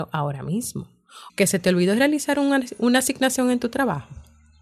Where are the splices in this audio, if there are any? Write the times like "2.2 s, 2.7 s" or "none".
1.3 s